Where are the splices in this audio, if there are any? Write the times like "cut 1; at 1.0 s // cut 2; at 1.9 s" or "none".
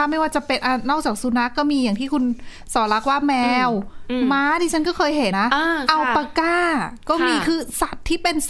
cut 1; at 5.3 s